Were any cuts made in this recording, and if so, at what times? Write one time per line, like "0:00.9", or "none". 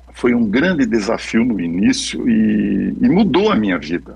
none